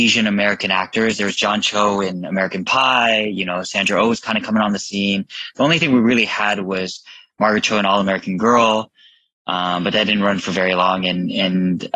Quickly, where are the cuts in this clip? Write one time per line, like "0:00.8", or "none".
none